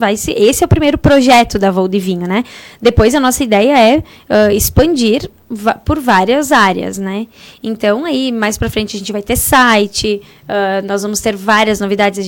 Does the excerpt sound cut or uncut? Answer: uncut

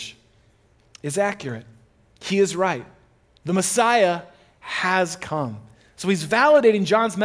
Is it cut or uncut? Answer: uncut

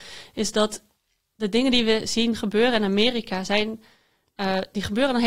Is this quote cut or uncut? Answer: uncut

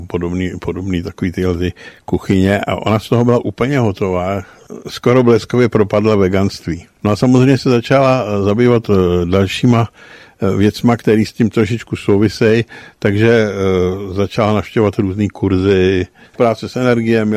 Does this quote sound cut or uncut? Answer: cut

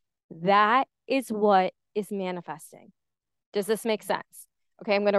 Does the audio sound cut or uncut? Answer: uncut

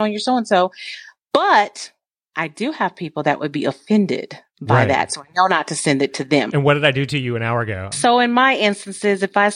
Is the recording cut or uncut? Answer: cut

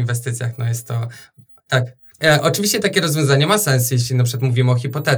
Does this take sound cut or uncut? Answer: cut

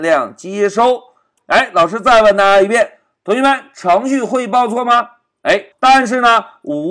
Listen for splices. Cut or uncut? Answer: cut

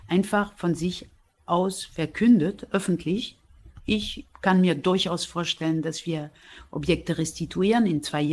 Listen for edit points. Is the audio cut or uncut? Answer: uncut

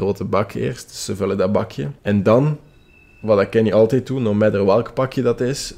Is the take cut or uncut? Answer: cut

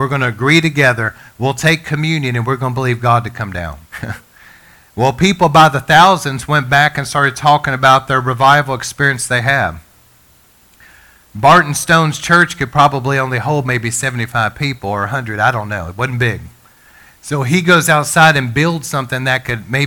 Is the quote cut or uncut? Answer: cut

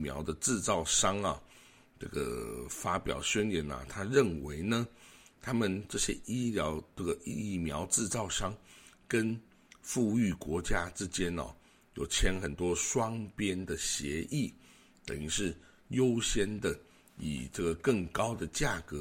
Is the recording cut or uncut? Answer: uncut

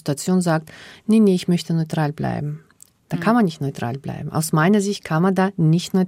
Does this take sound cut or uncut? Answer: uncut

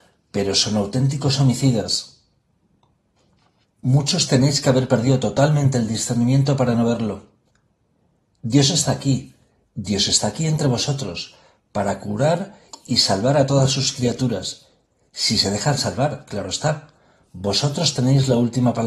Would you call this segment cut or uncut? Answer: uncut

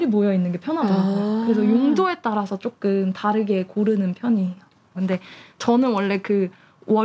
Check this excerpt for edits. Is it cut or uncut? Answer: cut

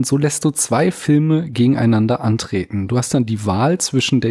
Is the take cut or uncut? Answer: uncut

